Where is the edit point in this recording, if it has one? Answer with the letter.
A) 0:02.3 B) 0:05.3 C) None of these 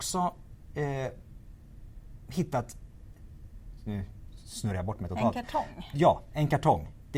C